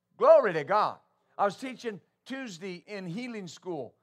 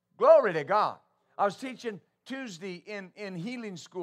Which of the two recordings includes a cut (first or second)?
first